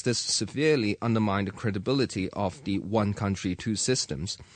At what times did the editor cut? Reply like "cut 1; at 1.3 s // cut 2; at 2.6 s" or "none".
none